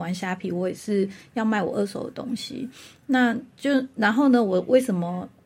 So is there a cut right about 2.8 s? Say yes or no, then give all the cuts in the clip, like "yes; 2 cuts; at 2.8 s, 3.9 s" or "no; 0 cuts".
no; 0 cuts